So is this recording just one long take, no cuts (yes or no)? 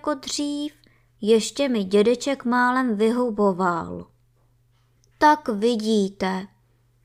no